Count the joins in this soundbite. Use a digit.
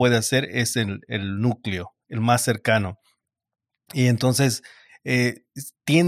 0